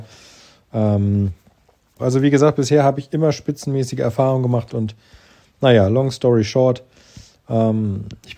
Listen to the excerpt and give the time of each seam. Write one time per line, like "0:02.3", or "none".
0:02.0
0:04.7

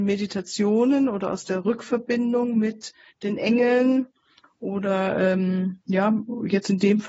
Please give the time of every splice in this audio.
none

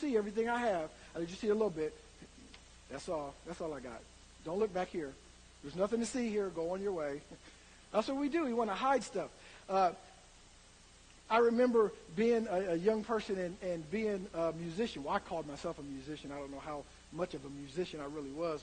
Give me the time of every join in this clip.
none

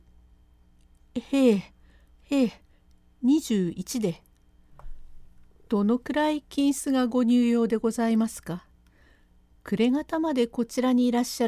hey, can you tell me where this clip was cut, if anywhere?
none

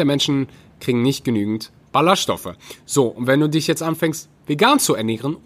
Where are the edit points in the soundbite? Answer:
none

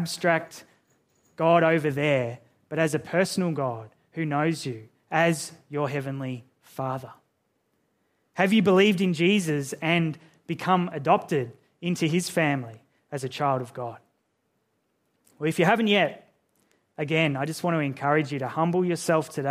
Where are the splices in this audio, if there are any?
none

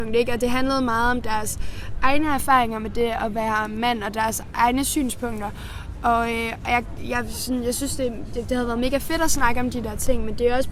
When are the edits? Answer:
none

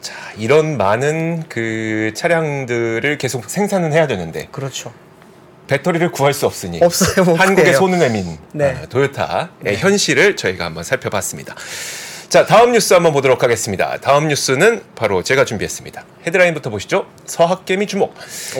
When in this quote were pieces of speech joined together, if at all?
none

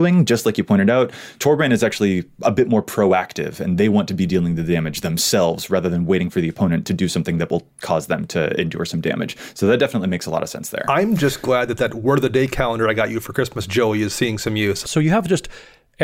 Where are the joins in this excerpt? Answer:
0:14.8

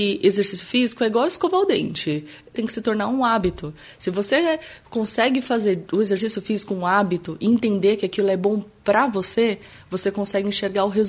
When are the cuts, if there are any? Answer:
none

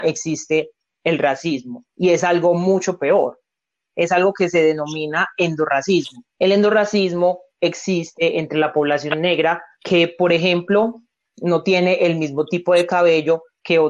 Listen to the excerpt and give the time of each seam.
0:06.3

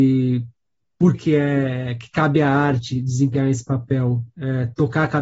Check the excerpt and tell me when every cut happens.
0:01.1

